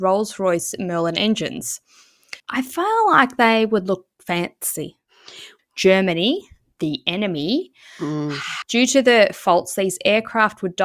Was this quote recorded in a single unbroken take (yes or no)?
no